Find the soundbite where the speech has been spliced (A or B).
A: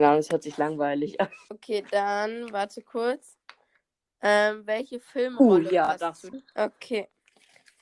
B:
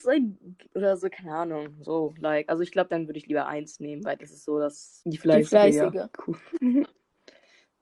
B